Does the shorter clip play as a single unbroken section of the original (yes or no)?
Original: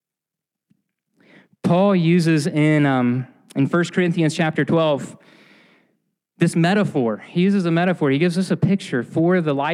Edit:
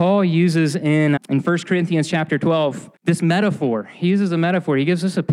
no